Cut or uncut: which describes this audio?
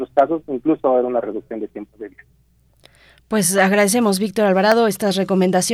uncut